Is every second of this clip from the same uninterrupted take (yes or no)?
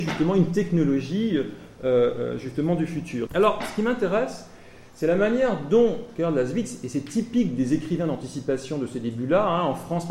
no